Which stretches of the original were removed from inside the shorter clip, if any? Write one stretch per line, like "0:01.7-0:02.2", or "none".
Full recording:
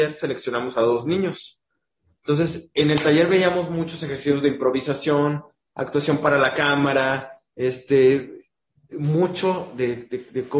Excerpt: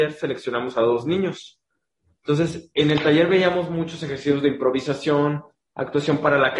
none